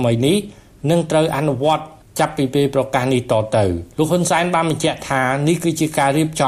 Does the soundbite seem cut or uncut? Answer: cut